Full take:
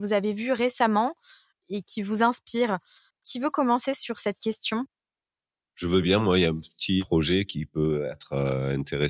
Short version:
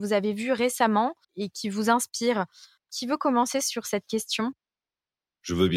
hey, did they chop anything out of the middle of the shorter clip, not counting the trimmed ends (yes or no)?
yes